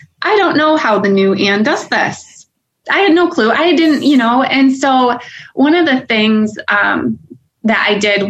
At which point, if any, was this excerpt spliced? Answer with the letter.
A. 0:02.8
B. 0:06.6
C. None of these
A